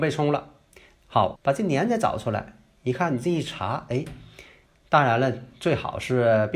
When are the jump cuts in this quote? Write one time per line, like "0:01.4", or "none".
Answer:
0:01.4